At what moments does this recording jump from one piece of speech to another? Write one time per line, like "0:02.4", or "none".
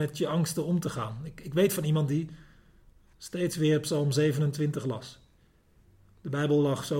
0:03.1